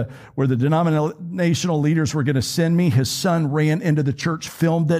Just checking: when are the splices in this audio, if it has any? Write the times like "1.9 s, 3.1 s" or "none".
none